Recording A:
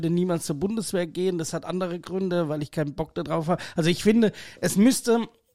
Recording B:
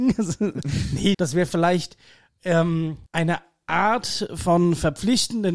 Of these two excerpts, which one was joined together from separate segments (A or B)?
B